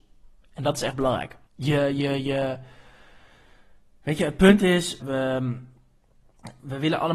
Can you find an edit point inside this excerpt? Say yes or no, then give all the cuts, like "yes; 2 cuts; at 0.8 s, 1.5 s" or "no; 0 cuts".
yes; 2 cuts; at 1.5 s, 5.0 s